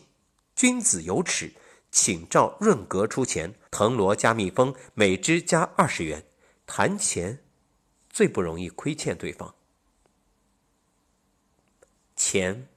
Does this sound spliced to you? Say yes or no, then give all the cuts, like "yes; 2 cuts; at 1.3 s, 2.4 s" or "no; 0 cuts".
yes; 2 cuts; at 3.7 s, 6.6 s